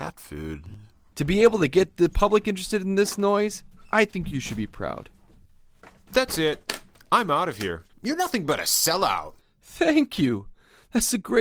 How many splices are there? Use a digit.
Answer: 2